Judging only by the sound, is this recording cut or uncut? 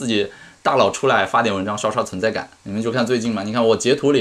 cut